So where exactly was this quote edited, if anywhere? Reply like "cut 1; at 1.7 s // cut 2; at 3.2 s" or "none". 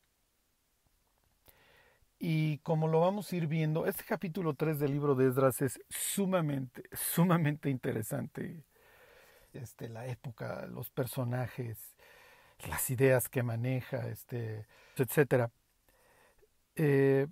cut 1; at 9.5 s // cut 2; at 15.0 s